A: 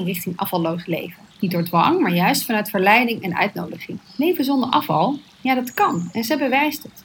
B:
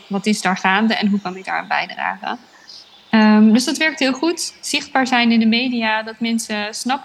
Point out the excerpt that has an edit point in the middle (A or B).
A